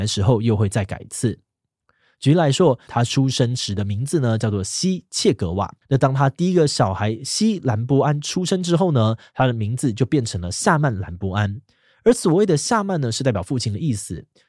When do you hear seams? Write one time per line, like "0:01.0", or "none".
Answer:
0:02.9
0:05.8